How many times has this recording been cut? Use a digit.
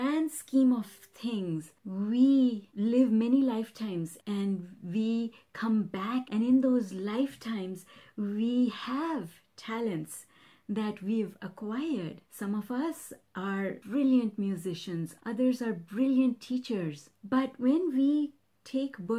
2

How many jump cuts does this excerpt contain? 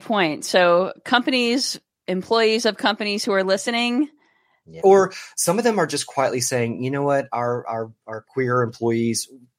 1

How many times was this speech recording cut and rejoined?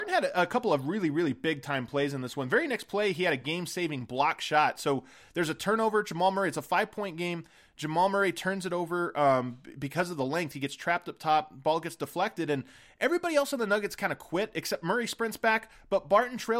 0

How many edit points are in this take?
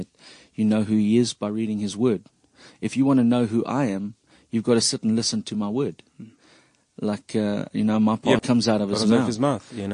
1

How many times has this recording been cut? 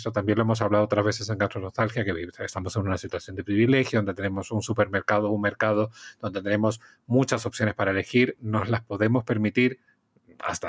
0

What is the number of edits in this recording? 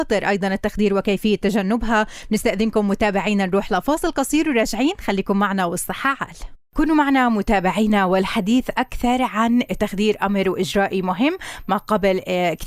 1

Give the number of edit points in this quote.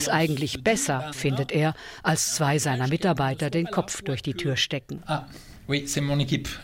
1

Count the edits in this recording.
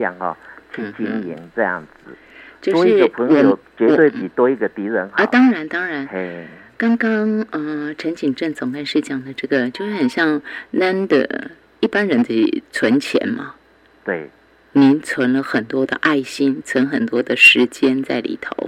1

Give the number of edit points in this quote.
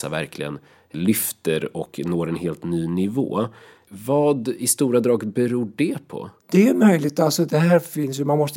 2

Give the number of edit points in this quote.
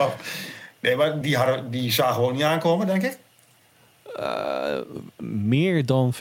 1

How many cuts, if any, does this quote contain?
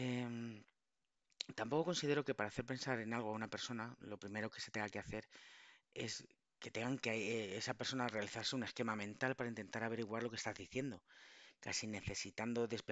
0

